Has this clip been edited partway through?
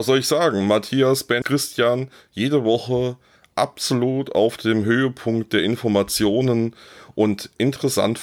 yes; 1 cut; at 1.4 s

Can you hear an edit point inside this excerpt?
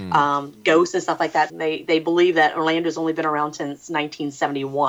yes; 1 cut; at 1.5 s

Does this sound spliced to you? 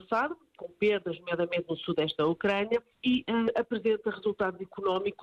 yes; 1 cut; at 2.9 s

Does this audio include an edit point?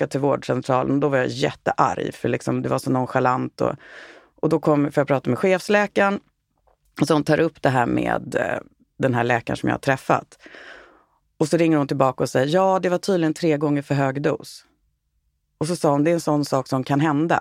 no; 0 cuts

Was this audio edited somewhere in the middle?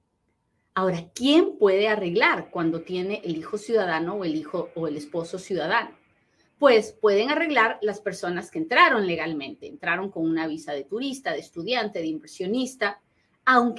no; 0 cuts

